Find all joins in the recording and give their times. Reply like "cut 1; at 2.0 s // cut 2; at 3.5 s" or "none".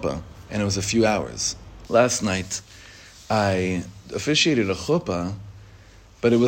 cut 1; at 1.9 s // cut 2; at 4.0 s